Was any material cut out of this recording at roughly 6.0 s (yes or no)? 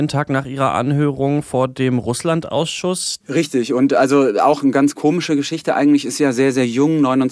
no